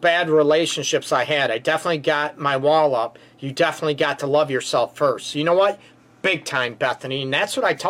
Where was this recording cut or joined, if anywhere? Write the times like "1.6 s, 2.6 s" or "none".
none